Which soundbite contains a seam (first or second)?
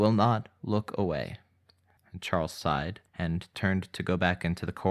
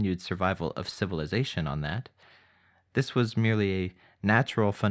first